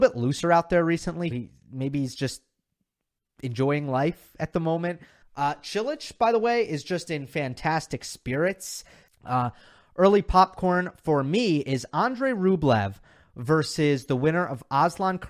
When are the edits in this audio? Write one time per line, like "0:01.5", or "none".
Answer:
0:01.3
0:05.2
0:09.1

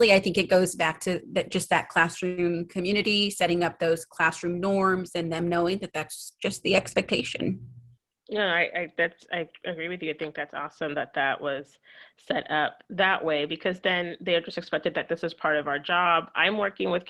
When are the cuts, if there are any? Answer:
none

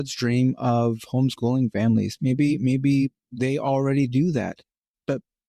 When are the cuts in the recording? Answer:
none

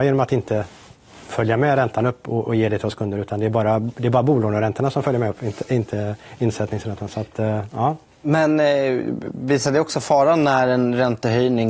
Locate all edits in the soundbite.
none

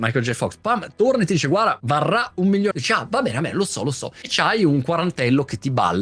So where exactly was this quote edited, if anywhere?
0:02.7

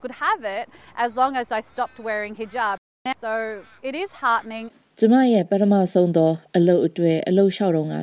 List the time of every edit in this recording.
0:03.1

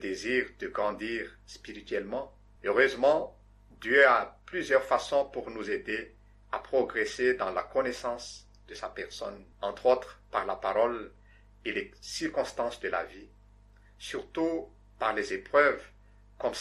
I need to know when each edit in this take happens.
0:02.6
0:09.5

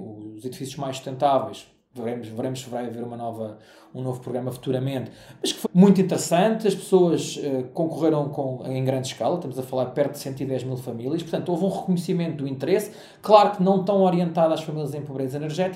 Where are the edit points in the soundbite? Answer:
0:05.6

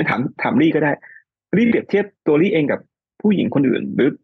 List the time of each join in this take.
0:02.2

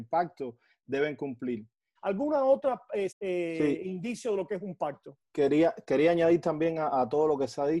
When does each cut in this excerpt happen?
0:01.9
0:03.1

